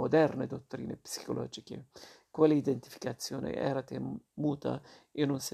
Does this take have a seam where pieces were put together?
no; 0 cuts

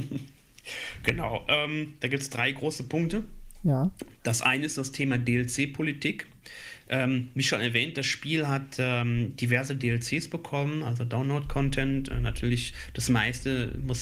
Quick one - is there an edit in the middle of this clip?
no; 0 cuts

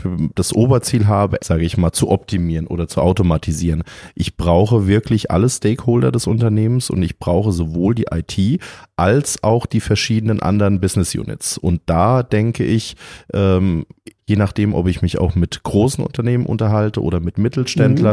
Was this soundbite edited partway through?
yes; 2 cuts; at 1.4 s, 14.2 s

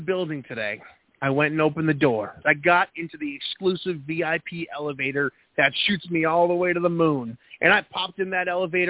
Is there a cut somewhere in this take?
yes; 1 cut; at 2.4 s

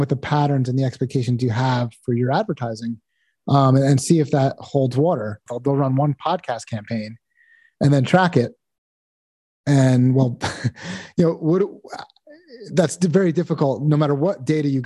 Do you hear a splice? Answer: yes; 1 cut; at 5.5 s

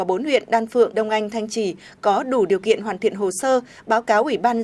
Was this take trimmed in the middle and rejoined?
yes; 1 cut; at 0.9 s

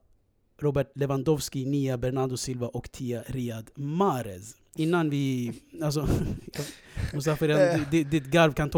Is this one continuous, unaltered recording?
yes; 0 cuts

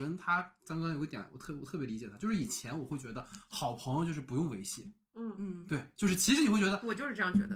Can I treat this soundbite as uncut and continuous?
yes; 0 cuts

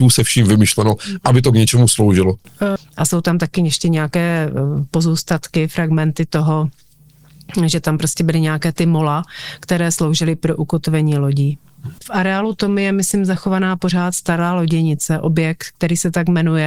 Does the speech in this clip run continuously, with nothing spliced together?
no; 2 cuts; at 2.8 s, 12.0 s

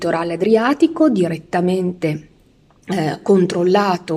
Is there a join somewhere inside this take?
no; 0 cuts

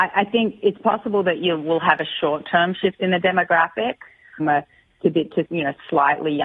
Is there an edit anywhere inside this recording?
yes; 2 cuts; at 4.4 s, 5.4 s

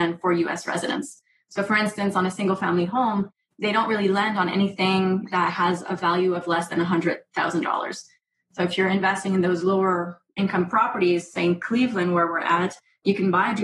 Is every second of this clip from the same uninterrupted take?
yes; 0 cuts

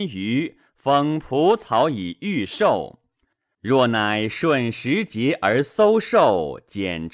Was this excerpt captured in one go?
no; 1 cut; at 3.5 s

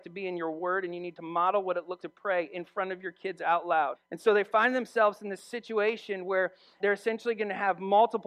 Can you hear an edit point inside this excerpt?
yes; 3 cuts; at 2.0 s, 3.9 s, 6.8 s

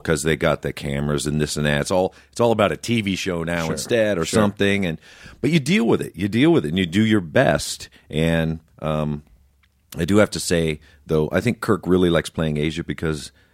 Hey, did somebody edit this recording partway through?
no; 0 cuts

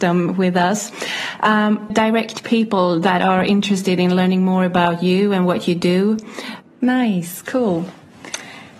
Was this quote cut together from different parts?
yes; 2 cuts; at 1.9 s, 6.6 s

